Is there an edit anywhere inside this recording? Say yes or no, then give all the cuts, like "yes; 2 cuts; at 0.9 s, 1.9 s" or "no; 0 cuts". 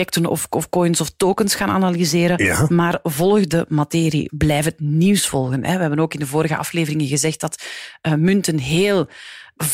yes; 1 cut; at 4.3 s